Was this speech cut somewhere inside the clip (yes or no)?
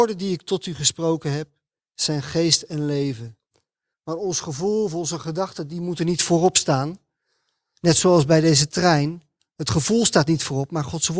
yes